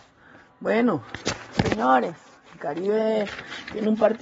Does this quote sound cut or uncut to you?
cut